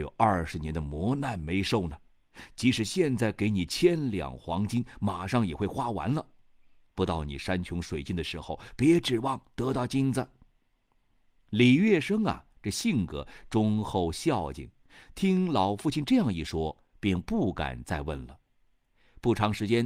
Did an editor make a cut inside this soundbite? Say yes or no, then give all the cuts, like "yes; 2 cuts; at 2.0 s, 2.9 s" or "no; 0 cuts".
no; 0 cuts